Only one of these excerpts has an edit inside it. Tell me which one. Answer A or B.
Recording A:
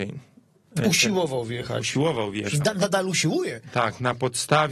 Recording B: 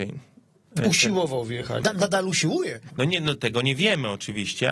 B